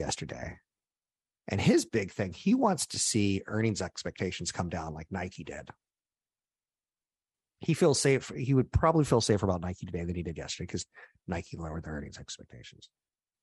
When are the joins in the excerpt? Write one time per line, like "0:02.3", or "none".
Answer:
none

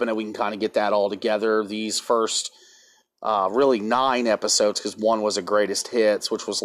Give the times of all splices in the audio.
none

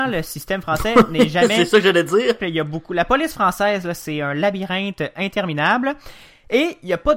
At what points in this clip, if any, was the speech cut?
0:02.4

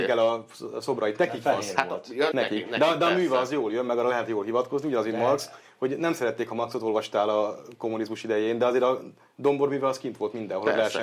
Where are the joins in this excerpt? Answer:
0:02.3

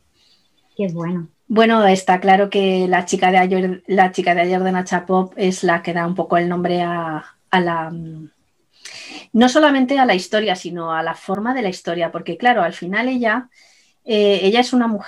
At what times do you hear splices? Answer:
0:01.3

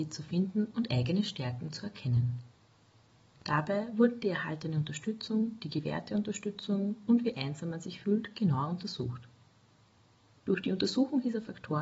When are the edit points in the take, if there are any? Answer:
0:03.3

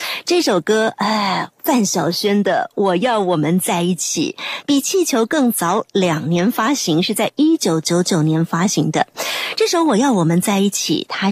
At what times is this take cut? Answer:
none

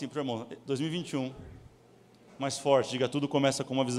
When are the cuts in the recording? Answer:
0:02.3

